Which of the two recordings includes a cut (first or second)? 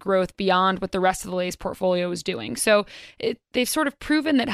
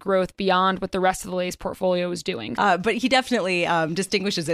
second